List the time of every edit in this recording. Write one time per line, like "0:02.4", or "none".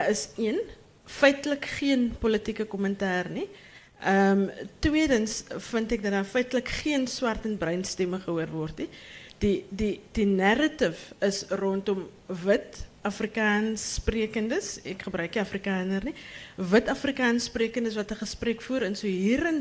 none